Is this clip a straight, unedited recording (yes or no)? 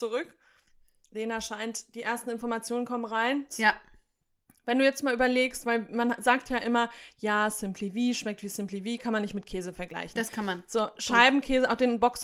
no